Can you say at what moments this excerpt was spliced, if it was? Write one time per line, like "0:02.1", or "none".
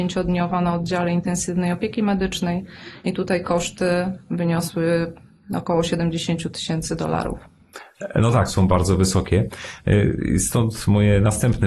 0:08.5